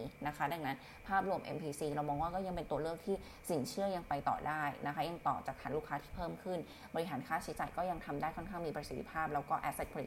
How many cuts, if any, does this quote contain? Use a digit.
1